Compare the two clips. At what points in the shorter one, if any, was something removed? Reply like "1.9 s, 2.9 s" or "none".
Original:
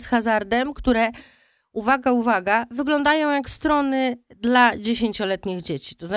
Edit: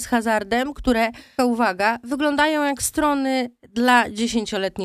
1.4 s